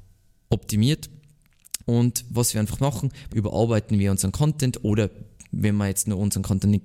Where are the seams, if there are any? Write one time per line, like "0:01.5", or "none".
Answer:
0:01.8
0:03.3